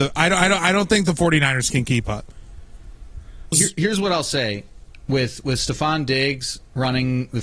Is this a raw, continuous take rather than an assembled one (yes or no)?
no